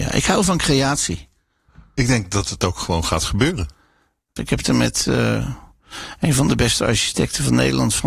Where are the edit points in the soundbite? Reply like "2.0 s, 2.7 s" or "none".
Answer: 4.4 s